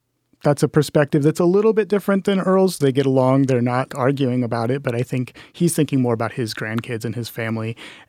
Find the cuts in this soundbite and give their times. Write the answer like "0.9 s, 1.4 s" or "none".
2.8 s, 3.9 s